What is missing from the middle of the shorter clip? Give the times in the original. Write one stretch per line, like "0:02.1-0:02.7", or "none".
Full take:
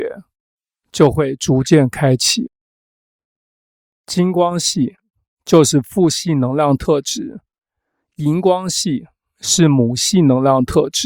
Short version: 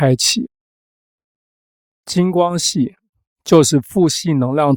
none